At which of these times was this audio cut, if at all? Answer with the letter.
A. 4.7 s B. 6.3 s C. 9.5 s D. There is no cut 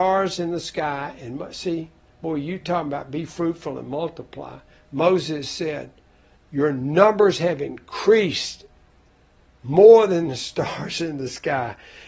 B